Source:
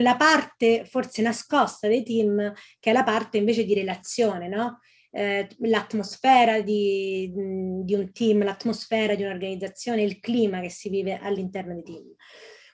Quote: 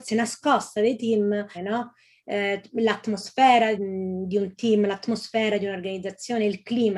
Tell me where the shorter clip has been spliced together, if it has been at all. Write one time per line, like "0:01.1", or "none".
0:01.5
0:03.8